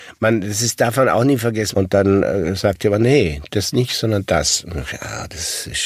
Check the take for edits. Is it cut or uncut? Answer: cut